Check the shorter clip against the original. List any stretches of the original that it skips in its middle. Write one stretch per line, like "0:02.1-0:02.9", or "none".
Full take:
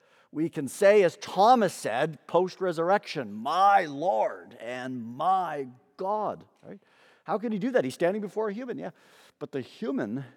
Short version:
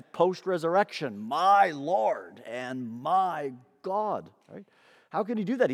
none